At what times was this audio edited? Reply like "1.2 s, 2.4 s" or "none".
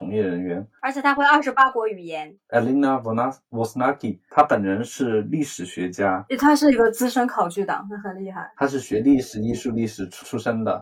2.4 s